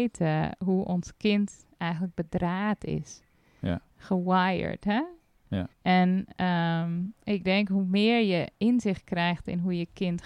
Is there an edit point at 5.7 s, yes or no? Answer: yes